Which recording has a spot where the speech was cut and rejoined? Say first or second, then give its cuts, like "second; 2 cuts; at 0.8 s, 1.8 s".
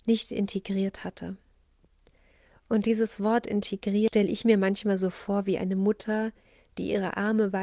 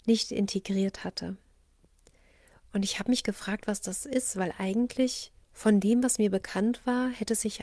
second; 2 cuts; at 2.6 s, 5.4 s